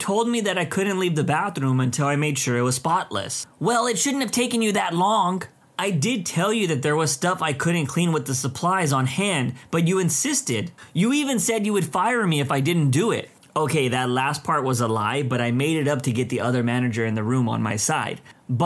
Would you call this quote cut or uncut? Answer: uncut